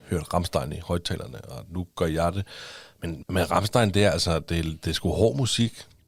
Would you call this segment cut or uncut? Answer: cut